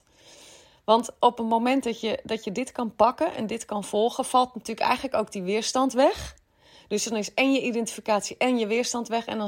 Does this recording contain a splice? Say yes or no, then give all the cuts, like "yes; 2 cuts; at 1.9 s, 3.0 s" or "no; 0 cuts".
no; 0 cuts